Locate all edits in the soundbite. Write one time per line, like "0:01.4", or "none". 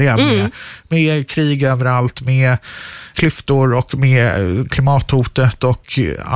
0:03.1